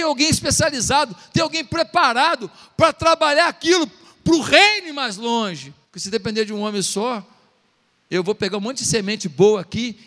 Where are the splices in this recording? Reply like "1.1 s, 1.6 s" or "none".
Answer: 5.8 s